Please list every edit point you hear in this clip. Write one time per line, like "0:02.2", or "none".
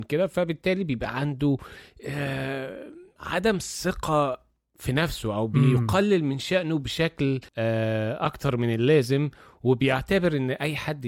0:07.5